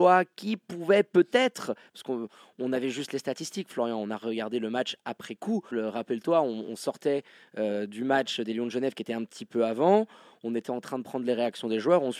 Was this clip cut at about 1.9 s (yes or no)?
no